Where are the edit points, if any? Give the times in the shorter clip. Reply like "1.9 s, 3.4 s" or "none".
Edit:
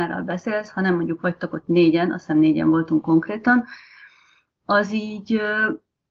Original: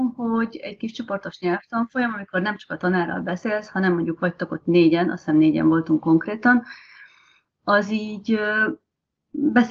none